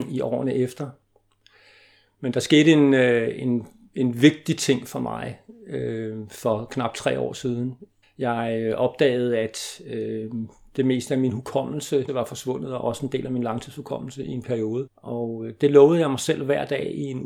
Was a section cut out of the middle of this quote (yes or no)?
yes